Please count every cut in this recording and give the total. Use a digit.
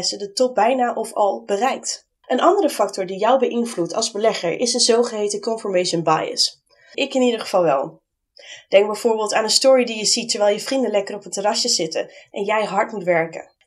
2